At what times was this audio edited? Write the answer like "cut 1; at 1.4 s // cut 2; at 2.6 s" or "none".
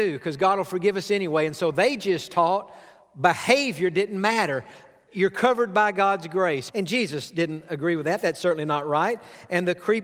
cut 1; at 6.7 s